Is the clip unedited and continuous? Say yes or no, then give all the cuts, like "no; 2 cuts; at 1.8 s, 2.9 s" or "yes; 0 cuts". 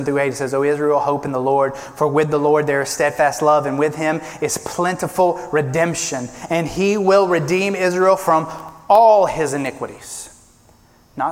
yes; 0 cuts